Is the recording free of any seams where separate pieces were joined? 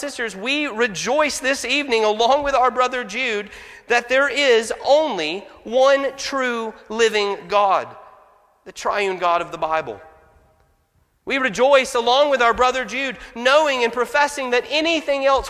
yes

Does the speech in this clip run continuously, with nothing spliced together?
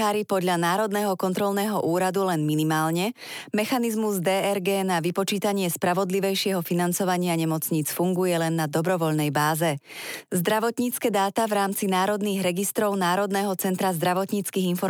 yes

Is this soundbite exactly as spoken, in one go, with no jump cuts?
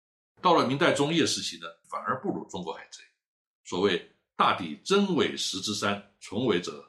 no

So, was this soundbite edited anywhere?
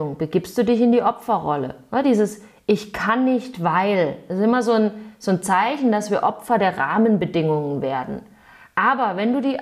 no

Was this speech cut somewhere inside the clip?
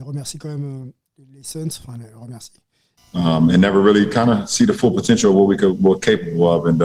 yes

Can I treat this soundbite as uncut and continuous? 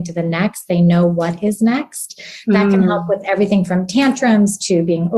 yes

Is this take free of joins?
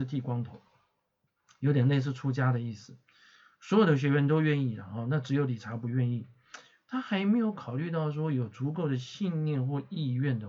yes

